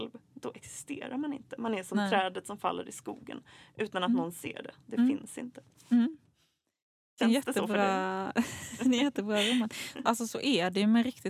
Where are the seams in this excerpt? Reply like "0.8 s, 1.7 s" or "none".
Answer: 10.0 s